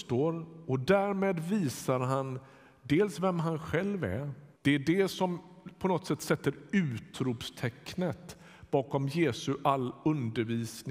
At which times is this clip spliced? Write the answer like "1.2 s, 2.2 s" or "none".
4.5 s